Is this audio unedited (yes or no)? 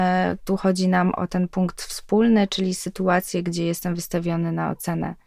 no